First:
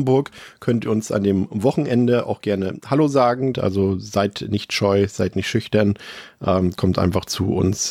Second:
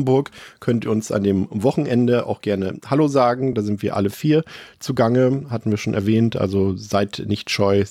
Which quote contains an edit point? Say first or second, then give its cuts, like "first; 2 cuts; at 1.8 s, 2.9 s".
first; 1 cut; at 3.5 s